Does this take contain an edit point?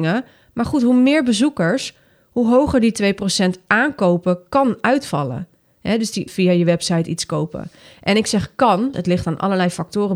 yes; 2 cuts; at 6.3 s, 8.9 s

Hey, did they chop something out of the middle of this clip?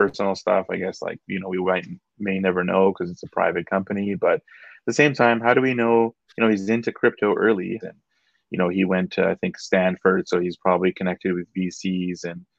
yes; 1 cut; at 7.8 s

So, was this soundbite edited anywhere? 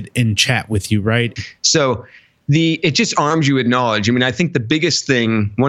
yes; 1 cut; at 1.4 s

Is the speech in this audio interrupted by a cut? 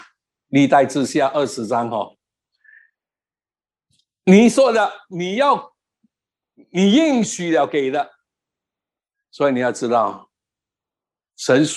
no; 0 cuts

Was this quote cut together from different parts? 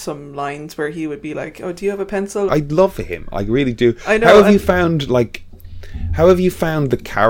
yes; 1 cut; at 2.5 s

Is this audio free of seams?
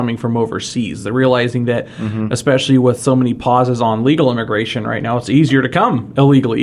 yes; 0 cuts

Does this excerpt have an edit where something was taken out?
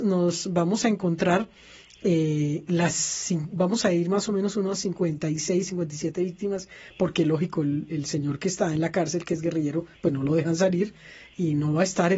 no; 0 cuts

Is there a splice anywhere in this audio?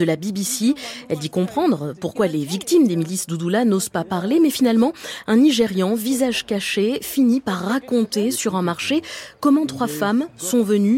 no; 0 cuts

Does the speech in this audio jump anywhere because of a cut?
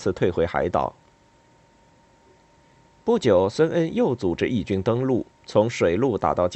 no; 0 cuts

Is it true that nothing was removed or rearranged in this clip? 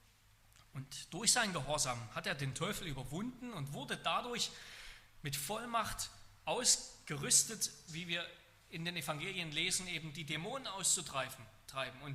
no; 1 cut; at 7.9 s

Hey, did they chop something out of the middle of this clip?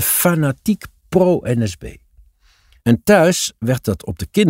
no; 0 cuts

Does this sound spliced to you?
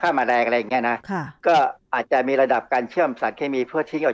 no; 0 cuts

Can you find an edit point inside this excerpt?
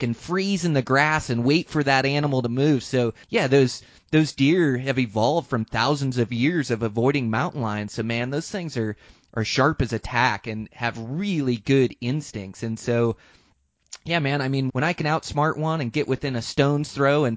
yes; 2 cuts; at 3.2 s, 14.7 s

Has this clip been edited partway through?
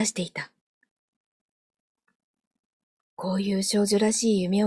no; 0 cuts

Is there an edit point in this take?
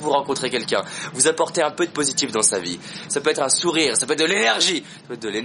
yes; 1 cut; at 3.1 s

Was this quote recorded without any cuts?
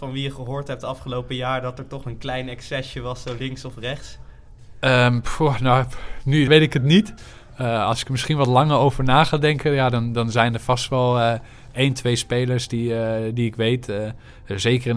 no; 1 cut; at 6.5 s

